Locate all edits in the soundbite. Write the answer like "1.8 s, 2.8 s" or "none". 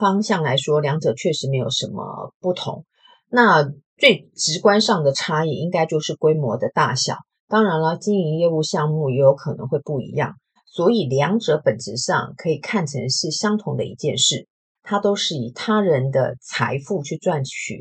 10.6 s, 14.8 s